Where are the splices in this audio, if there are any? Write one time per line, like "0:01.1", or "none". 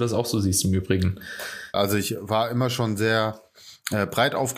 0:01.7